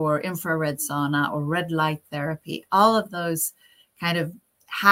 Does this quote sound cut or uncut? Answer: uncut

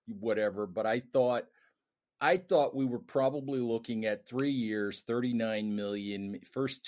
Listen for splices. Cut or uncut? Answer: uncut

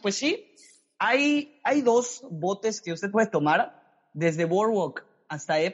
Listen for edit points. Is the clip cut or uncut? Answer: uncut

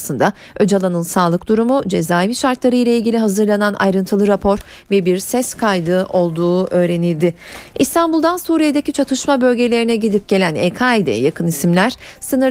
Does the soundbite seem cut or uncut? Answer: cut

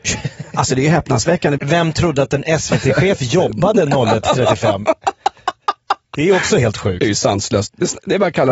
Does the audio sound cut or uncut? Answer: cut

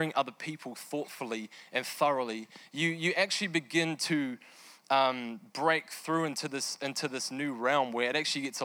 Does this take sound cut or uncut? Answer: uncut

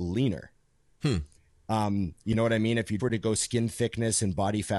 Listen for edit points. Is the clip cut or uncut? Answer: cut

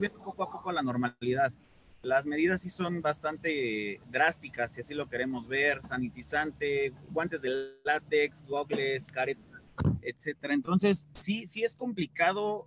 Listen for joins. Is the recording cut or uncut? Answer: uncut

